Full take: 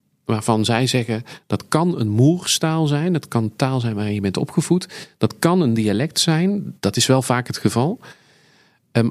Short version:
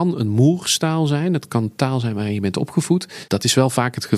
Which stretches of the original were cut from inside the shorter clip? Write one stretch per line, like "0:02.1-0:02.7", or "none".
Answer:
0:05.1-0:06.8